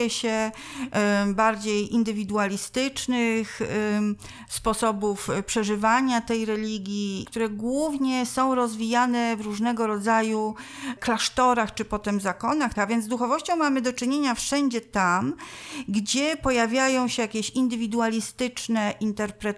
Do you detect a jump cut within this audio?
yes; 2 cuts; at 7.2 s, 12.8 s

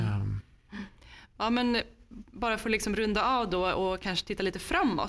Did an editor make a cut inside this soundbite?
no; 0 cuts

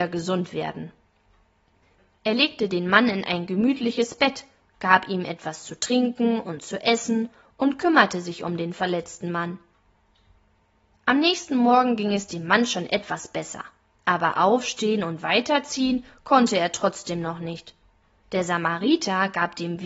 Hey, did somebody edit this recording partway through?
no; 0 cuts

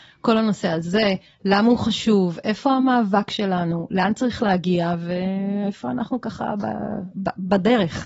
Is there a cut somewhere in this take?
no; 0 cuts

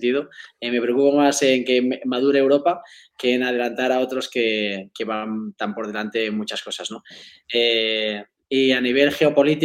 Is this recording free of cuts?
yes; 0 cuts

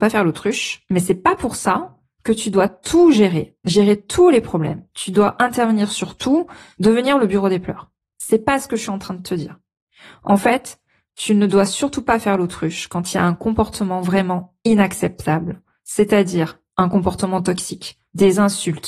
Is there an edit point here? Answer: no; 0 cuts

